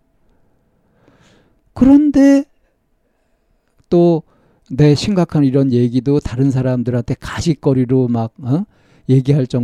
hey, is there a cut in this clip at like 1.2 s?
no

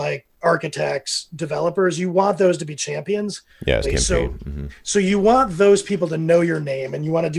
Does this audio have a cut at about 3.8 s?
yes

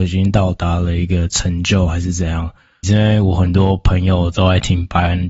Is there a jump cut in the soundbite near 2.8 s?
yes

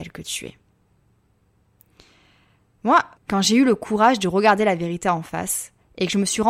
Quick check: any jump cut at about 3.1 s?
yes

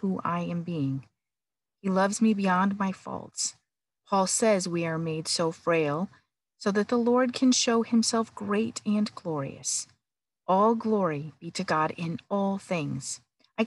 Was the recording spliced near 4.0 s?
yes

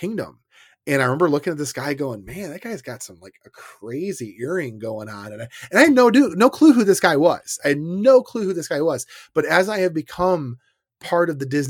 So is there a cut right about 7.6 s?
no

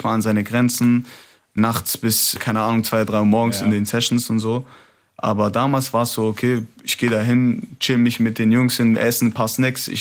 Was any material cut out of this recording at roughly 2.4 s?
yes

